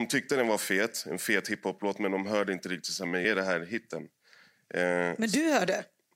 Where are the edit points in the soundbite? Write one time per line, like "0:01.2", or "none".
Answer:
none

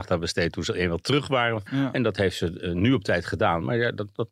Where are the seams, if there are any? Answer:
0:01.7

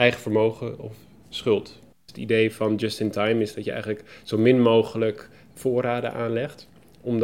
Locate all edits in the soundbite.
0:01.9

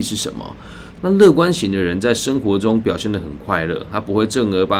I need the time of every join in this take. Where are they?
0:00.9

